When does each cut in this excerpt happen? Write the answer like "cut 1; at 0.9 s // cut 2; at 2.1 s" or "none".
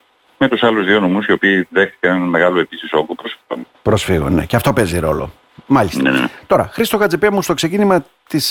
none